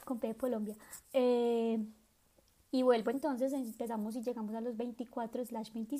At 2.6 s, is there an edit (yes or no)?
no